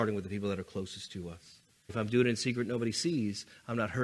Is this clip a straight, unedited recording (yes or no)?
no